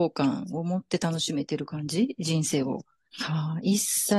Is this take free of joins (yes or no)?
no